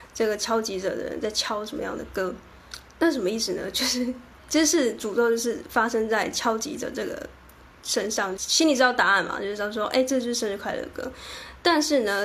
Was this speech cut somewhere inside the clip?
yes; 2 cuts; at 2.9 s, 8.4 s

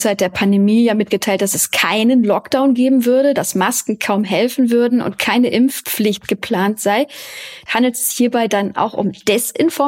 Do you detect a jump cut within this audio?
yes; 1 cut; at 7.7 s

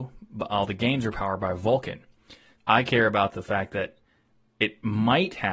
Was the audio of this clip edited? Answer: yes; 1 cut; at 2.6 s

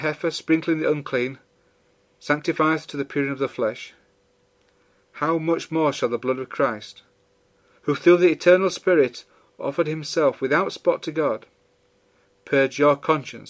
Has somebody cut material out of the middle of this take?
no; 0 cuts

